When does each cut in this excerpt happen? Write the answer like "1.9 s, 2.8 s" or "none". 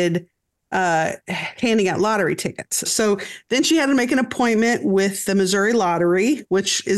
2.8 s